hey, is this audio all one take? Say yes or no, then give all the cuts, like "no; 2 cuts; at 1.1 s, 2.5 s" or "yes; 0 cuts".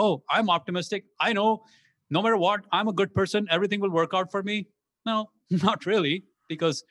yes; 0 cuts